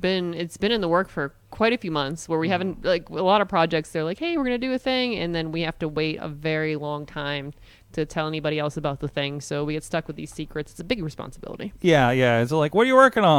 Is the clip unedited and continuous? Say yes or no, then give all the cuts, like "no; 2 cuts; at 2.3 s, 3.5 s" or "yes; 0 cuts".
yes; 0 cuts